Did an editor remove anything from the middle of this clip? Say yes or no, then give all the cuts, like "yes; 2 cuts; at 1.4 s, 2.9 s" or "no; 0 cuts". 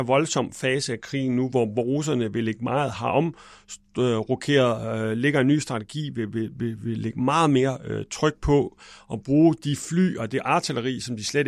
yes; 1 cut; at 2.9 s